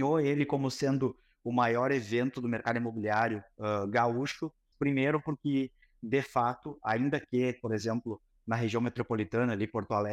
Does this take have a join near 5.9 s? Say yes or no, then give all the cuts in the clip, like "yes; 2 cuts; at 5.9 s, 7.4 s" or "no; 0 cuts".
no; 1 cut; at 4.7 s